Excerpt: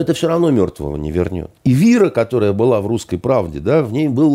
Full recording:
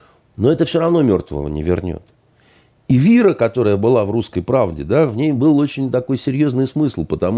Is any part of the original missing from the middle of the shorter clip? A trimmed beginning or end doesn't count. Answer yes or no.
yes